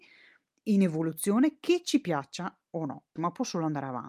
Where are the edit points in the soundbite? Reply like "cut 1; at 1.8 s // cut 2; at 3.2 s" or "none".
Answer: cut 1; at 3.2 s

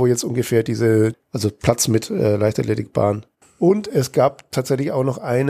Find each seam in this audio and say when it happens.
cut 1; at 1.1 s // cut 2; at 3.4 s

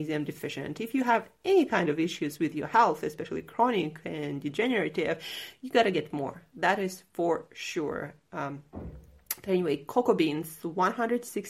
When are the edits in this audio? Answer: none

